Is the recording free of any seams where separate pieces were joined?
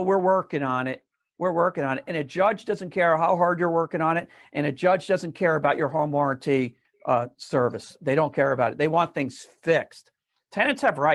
yes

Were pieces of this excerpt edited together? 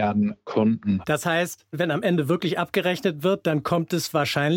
yes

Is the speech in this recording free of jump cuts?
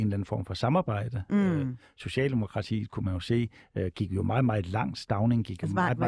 yes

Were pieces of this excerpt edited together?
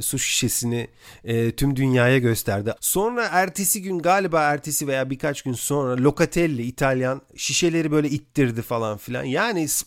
yes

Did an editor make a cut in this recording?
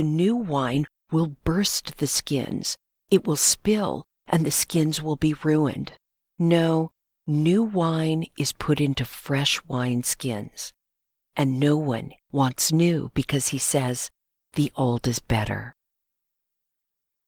yes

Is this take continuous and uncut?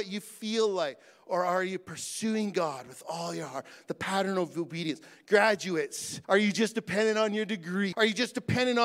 no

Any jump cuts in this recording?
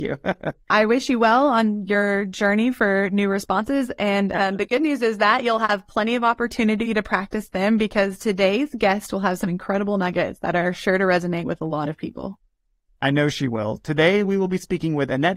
no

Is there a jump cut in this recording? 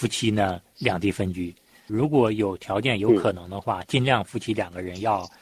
no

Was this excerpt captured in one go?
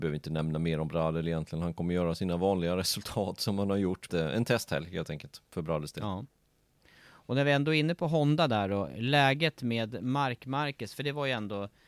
no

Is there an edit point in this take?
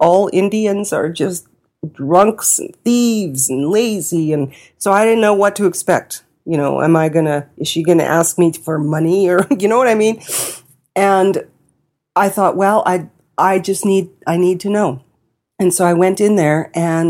no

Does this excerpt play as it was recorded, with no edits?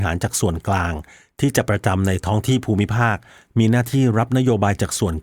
no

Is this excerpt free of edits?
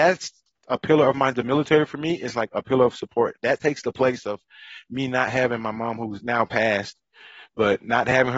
yes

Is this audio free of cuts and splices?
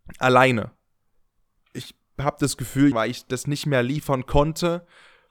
no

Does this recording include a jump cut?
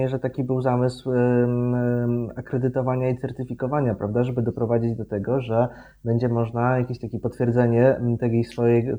no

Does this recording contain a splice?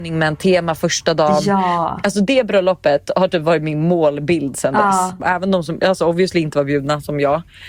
yes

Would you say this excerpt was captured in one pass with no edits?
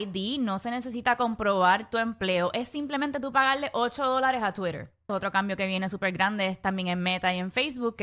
no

